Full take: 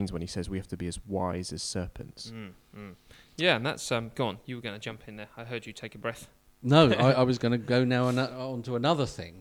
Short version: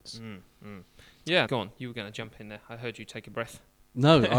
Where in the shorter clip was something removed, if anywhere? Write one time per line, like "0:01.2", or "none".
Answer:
0:01.5

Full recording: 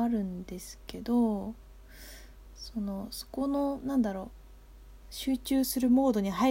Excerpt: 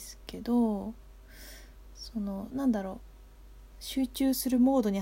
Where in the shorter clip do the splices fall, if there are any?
0:02.5

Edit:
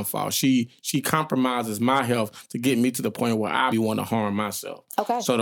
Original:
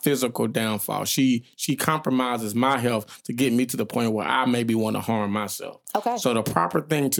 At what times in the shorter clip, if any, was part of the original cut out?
0:03.7

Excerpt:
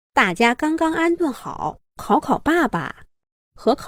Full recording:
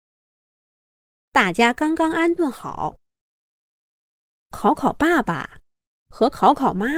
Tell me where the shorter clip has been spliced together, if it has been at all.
0:01.8

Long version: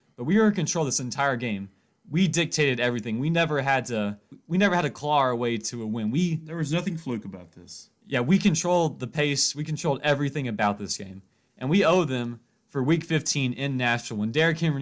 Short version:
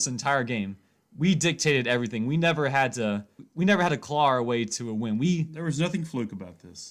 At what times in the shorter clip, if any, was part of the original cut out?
none

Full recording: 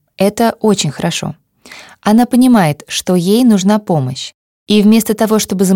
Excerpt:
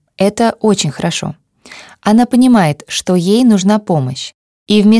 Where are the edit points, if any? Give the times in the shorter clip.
none

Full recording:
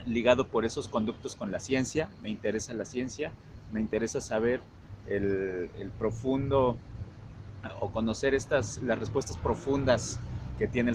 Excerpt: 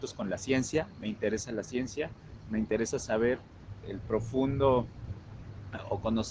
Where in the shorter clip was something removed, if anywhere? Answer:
0:03.8

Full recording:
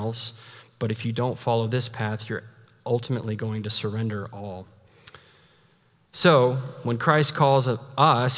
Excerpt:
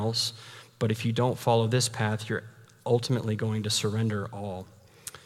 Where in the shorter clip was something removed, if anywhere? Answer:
none

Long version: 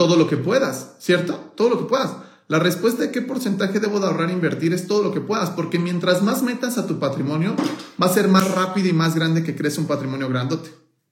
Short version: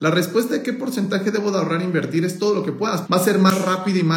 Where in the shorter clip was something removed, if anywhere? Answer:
0:03.0

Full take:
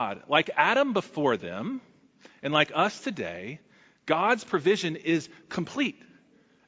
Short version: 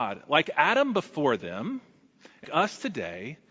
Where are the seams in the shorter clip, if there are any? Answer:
0:02.4

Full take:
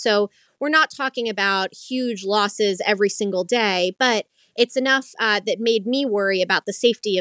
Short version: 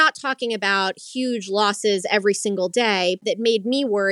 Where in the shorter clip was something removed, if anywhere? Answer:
0:03.2

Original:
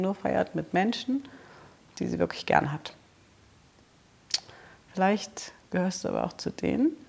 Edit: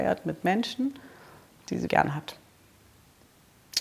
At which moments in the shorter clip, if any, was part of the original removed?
0:01.9

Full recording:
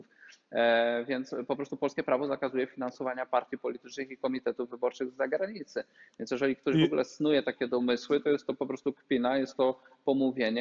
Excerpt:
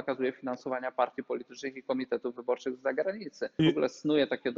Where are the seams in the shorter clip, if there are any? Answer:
0:03.6

